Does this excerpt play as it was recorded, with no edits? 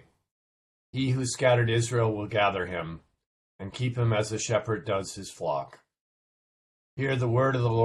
no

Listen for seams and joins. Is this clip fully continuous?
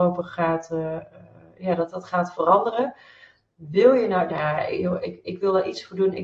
no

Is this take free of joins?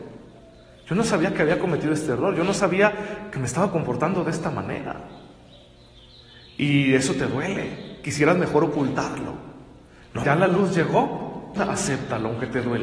no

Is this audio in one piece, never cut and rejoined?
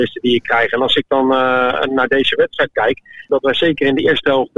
no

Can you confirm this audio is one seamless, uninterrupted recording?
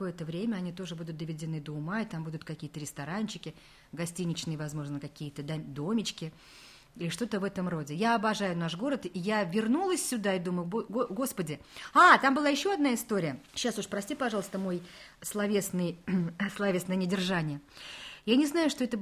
no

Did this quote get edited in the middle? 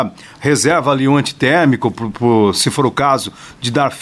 no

